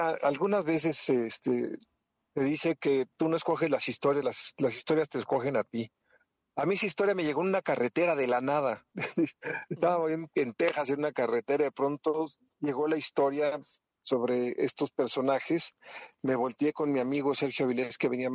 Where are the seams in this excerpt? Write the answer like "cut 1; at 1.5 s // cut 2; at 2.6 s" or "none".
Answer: none